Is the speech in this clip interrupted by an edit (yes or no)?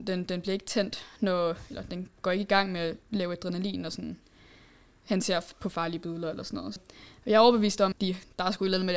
yes